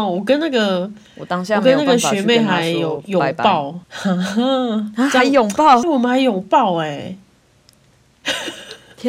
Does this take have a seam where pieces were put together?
yes; 2 cuts; at 3.8 s, 5.8 s

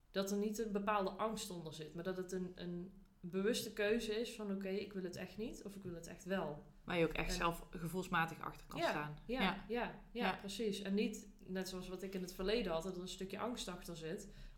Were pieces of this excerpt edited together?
no; 0 cuts

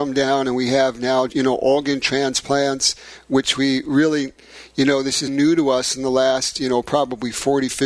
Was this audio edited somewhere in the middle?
yes; 2 cuts; at 1.3 s, 5.3 s

